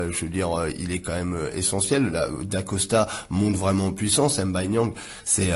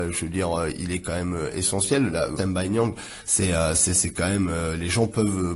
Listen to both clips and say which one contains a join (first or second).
second